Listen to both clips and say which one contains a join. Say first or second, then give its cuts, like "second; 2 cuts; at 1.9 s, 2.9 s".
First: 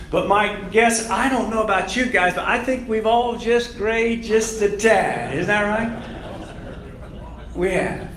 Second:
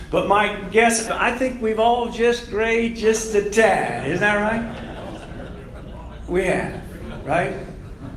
second; 1 cut; at 1.1 s